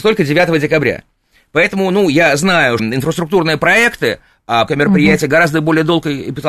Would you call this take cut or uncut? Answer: cut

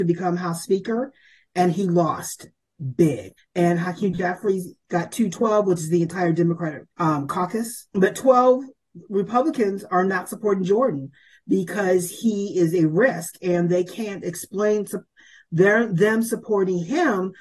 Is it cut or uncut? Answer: cut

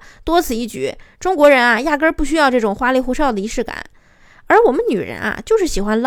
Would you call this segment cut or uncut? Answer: uncut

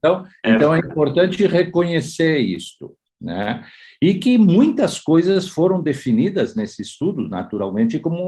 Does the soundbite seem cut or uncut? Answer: uncut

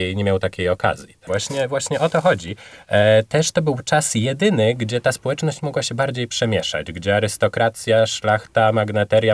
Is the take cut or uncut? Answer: cut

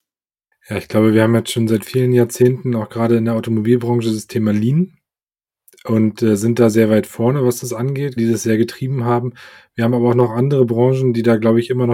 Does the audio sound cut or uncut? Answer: cut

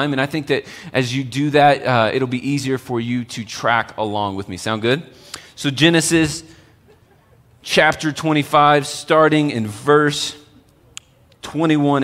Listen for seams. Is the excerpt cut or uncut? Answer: uncut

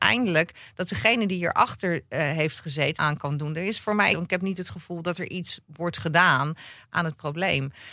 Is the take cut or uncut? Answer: cut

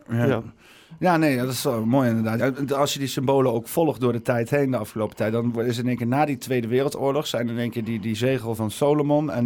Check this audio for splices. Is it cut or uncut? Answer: cut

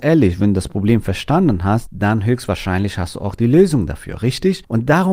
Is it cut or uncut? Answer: uncut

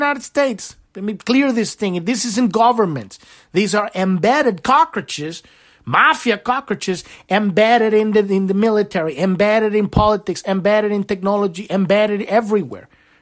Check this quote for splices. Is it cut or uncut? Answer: uncut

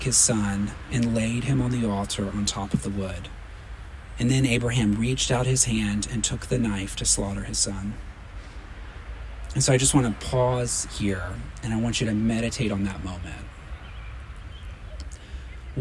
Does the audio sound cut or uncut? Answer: uncut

